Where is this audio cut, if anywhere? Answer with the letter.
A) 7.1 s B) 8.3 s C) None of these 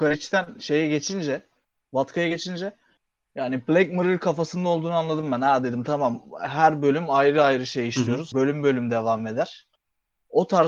B